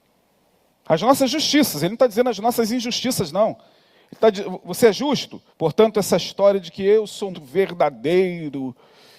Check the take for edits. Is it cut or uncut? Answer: cut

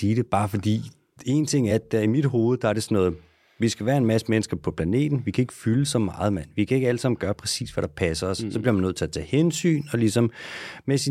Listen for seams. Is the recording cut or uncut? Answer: uncut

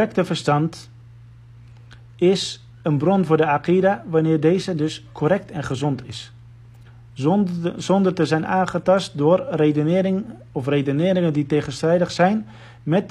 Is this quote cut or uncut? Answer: uncut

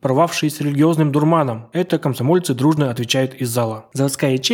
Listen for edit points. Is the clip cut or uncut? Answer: uncut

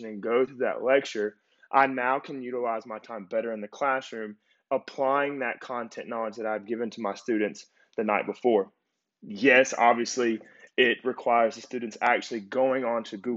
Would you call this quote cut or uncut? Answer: uncut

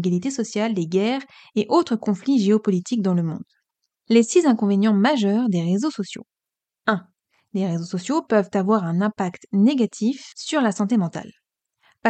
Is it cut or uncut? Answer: uncut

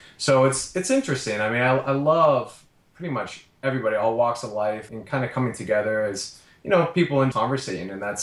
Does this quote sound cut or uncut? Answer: cut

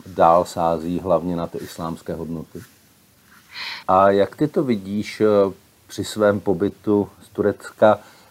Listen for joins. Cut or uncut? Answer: cut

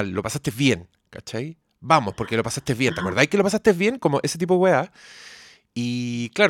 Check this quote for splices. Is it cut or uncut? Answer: uncut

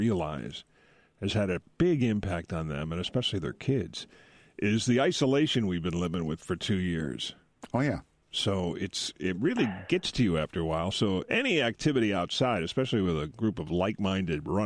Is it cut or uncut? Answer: uncut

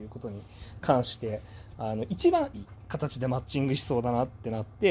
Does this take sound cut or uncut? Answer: cut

